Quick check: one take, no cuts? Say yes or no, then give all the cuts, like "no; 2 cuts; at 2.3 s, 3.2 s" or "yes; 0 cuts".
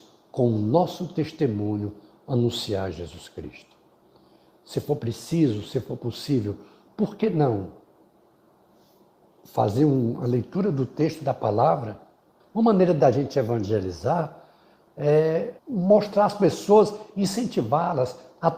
no; 2 cuts; at 12.4 s, 15.6 s